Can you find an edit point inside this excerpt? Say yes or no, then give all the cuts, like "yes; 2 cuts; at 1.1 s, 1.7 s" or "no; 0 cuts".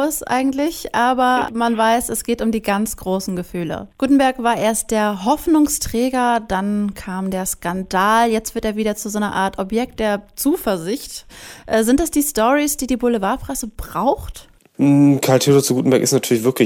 no; 0 cuts